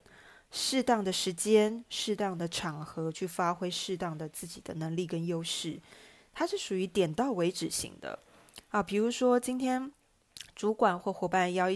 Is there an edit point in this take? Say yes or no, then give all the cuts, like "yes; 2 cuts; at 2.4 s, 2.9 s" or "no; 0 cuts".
no; 0 cuts